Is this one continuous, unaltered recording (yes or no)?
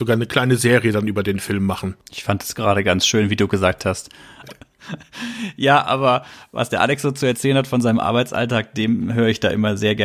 no